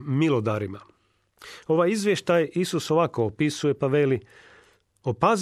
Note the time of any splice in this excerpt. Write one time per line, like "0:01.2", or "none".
none